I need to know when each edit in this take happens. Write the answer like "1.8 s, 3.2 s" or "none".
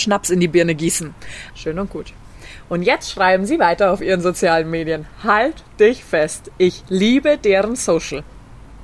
1.5 s